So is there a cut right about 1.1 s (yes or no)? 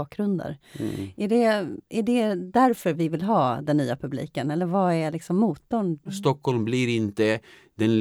no